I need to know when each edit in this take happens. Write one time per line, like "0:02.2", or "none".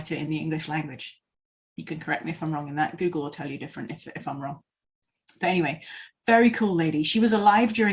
none